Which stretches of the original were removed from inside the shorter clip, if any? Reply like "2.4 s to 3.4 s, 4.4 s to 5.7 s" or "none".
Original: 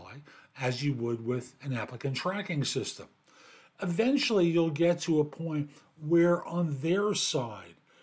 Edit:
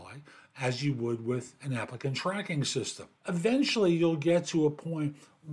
3.2 s to 3.7 s